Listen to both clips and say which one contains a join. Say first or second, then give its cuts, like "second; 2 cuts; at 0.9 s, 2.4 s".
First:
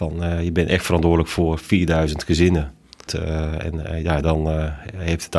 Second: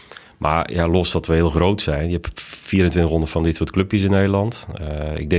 first; 2 cuts; at 3.1 s, 4.2 s